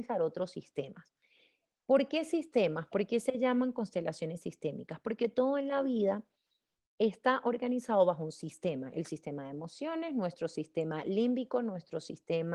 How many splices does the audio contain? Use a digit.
0